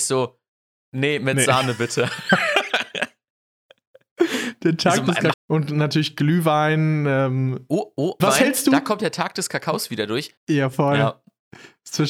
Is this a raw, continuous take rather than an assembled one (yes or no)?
no